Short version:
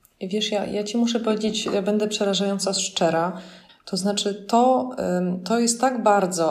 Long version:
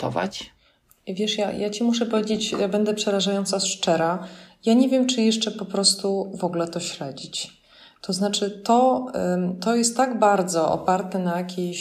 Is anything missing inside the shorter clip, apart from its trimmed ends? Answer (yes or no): yes